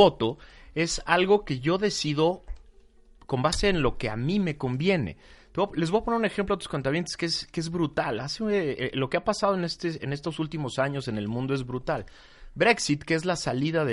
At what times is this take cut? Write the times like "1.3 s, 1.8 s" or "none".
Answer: none